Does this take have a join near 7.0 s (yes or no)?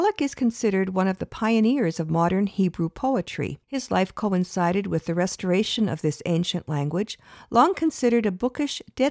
no